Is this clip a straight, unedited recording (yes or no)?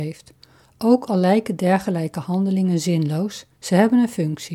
yes